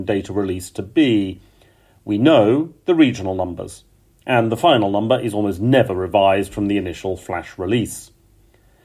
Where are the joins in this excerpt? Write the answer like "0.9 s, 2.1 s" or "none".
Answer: none